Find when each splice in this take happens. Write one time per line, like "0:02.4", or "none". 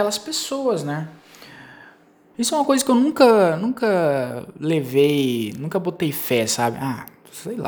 0:02.3